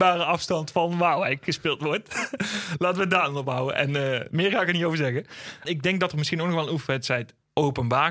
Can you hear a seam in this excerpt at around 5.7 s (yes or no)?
yes